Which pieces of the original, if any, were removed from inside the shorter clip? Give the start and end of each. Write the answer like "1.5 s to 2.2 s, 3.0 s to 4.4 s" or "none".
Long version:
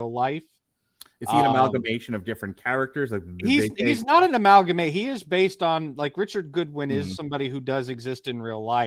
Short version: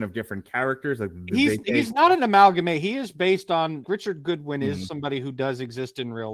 6.0 s to 6.1 s